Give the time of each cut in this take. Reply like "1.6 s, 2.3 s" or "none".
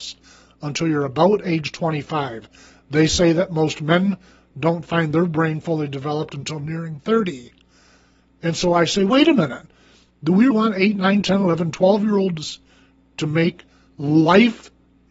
10.5 s